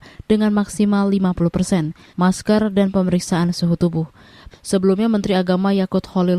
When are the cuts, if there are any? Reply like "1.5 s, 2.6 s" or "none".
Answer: 2.1 s, 4.5 s